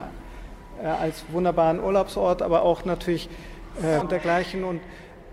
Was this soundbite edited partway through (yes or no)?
yes